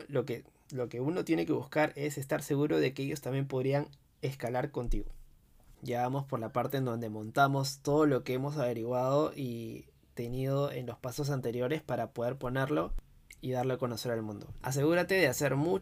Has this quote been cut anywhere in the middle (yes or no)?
yes